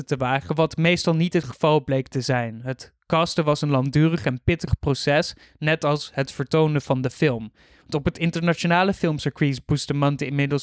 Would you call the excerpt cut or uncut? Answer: uncut